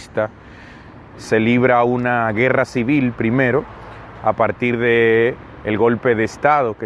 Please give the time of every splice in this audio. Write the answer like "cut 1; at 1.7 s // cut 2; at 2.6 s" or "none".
cut 1; at 1.1 s

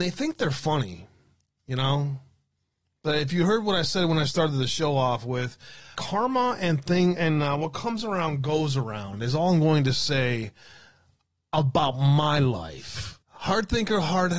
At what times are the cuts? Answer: cut 1; at 5.9 s // cut 2; at 13.2 s

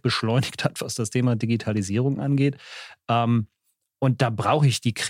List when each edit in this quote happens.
none

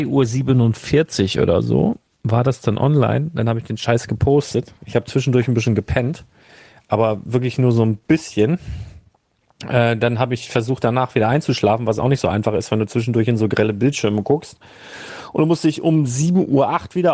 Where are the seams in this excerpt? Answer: none

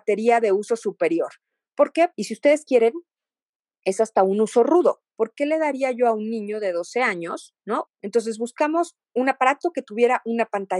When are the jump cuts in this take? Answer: cut 1; at 2.1 s // cut 2; at 7.9 s // cut 3; at 9.0 s

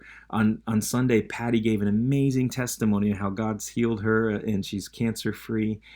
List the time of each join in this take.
none

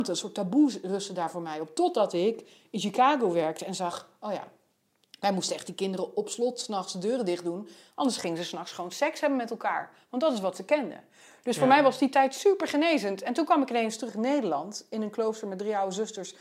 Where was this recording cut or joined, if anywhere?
none

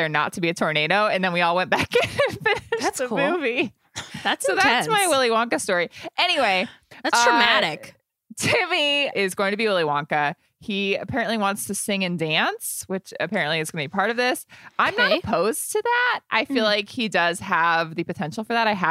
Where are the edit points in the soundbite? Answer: cut 1; at 9.1 s

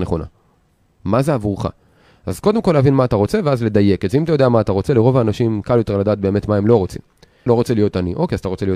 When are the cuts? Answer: cut 1; at 4.9 s // cut 2; at 7.5 s

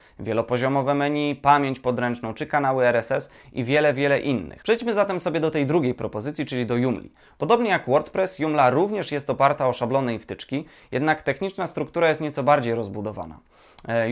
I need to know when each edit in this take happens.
cut 1; at 4.6 s

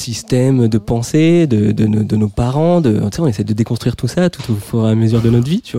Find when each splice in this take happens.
none

